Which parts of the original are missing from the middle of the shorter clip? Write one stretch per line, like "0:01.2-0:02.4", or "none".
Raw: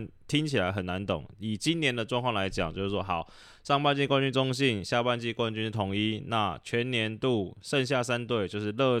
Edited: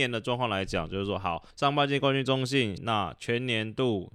0:03.3-0:03.6
0:04.8-0:06.2